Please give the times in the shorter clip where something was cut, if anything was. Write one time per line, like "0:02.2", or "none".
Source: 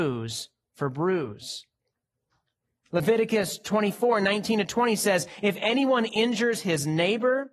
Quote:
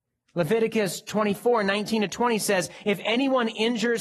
none